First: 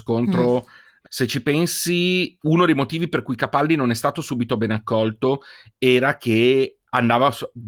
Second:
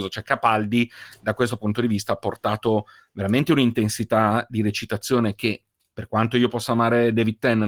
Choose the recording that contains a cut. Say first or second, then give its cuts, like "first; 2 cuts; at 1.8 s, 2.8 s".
first; 2 cuts; at 1.0 s, 2.4 s